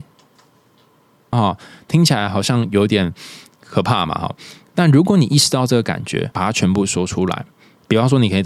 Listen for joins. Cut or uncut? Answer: cut